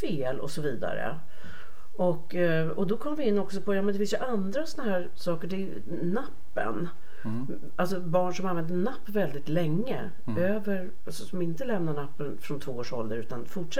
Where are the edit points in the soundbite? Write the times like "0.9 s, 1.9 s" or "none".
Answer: none